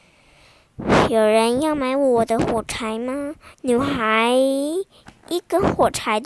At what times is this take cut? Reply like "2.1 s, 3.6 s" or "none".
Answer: 3.5 s